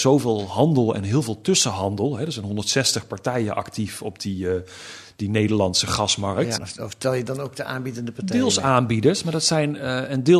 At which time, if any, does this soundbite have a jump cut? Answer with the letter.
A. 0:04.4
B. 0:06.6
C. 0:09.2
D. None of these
B